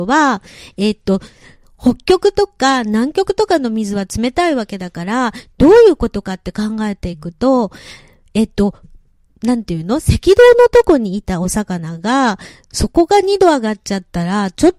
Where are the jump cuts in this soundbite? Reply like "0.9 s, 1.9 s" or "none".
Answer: none